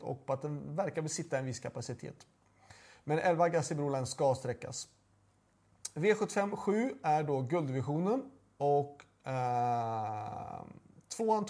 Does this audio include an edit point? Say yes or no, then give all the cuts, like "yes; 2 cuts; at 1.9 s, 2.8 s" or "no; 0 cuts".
no; 0 cuts